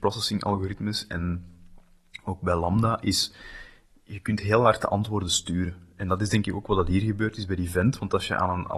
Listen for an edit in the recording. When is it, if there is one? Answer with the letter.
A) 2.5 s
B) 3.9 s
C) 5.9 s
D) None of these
D